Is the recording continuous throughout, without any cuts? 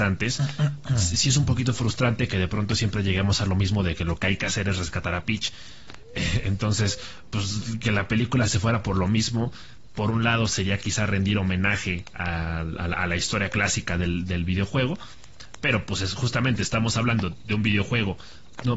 yes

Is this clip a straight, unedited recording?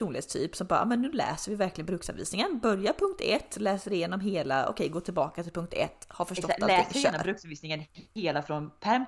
yes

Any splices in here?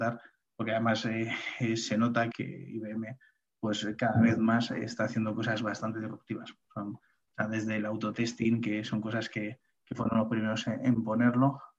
yes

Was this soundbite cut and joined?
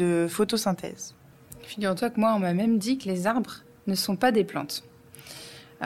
no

